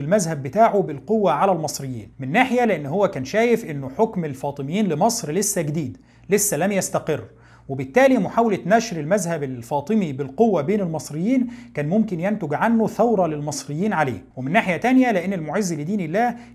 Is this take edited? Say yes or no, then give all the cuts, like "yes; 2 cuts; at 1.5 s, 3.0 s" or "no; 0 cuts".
yes; 2 cuts; at 2.1 s, 14.3 s